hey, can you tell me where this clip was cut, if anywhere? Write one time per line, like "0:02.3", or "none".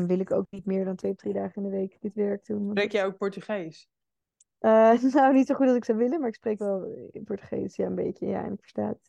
none

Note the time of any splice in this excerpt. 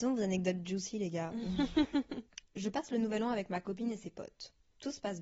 0:02.4

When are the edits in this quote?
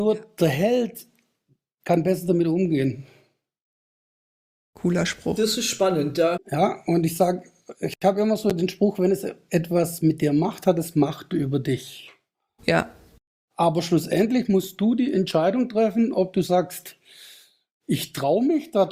0:06.4

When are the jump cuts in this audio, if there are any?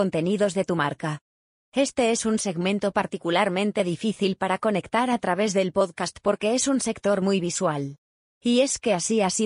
0:01.6
0:08.2

